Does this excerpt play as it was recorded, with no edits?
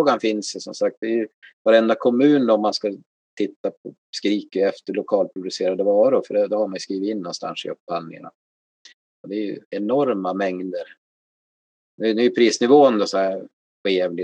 yes; 0 cuts

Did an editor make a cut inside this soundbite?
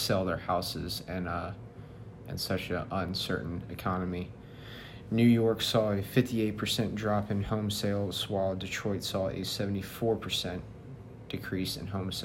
no; 0 cuts

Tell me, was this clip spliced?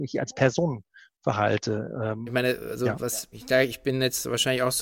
yes; 2 cuts; at 2.3 s, 3.3 s

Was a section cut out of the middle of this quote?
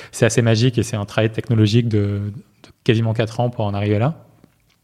no; 0 cuts

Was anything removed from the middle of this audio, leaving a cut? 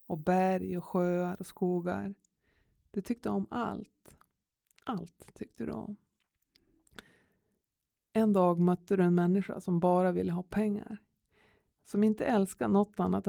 yes; 1 cut; at 11.7 s

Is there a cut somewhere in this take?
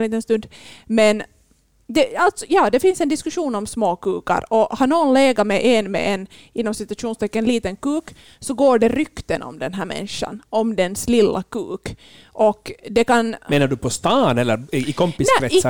no; 0 cuts

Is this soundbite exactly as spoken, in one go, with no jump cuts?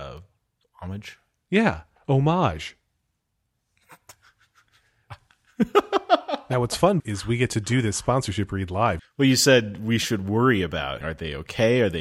no; 3 cuts; at 7.0 s, 9.0 s, 11.0 s

